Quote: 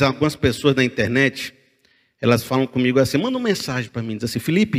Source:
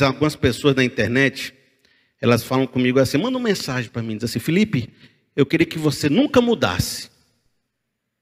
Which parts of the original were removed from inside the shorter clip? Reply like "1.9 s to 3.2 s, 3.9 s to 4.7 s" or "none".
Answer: none